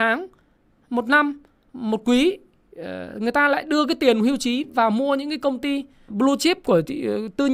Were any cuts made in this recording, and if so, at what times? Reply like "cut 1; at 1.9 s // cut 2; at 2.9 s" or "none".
cut 1; at 6.1 s